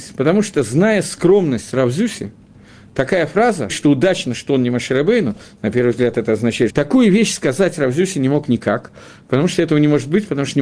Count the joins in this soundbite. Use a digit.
2